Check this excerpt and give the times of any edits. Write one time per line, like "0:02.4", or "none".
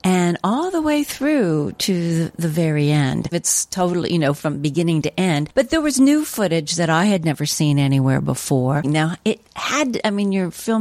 0:03.3
0:08.8